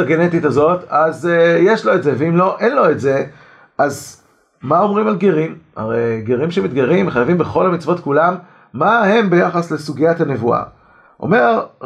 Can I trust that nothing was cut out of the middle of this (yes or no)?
yes